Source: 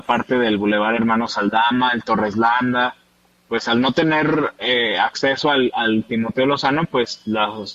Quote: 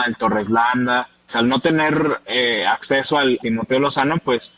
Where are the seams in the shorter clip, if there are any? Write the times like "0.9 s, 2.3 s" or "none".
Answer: 1.3 s, 3.4 s